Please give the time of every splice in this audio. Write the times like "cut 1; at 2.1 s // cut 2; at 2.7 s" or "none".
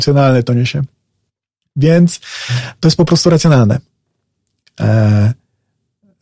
none